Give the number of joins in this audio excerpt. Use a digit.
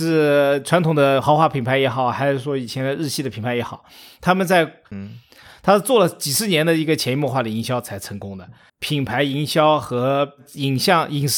2